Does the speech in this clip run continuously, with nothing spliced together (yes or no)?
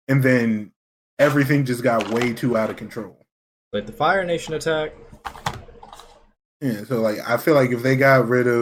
yes